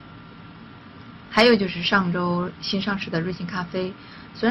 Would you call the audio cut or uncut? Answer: uncut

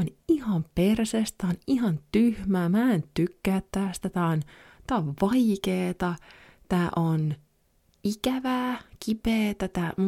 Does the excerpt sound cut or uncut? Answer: uncut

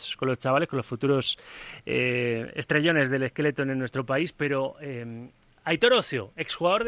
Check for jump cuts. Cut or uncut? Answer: uncut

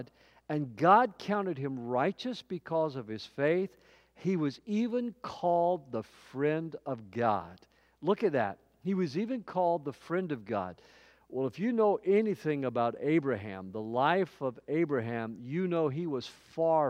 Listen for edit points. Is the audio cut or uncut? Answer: uncut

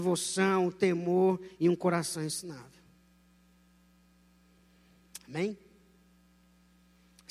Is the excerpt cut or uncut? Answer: uncut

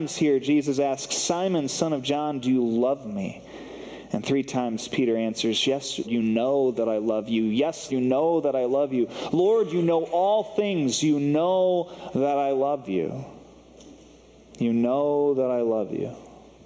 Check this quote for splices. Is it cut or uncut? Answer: cut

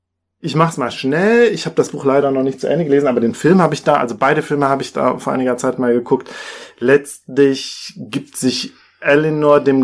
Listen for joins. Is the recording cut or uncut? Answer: uncut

